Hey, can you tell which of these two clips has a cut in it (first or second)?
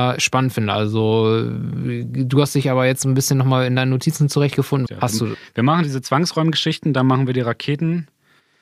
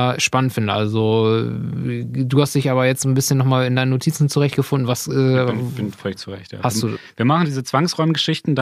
first